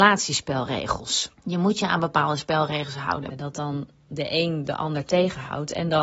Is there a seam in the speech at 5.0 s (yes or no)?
no